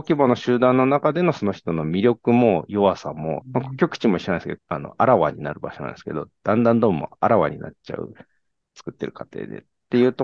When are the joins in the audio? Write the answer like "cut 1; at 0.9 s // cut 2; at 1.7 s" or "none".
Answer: cut 1; at 3.4 s // cut 2; at 4.6 s